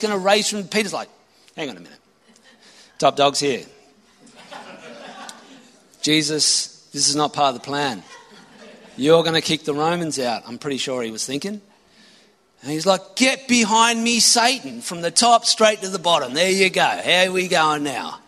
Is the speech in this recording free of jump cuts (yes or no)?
yes